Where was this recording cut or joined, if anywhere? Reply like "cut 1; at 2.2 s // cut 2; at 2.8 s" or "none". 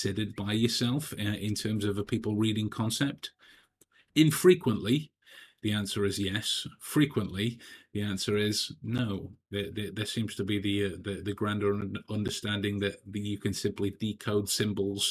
none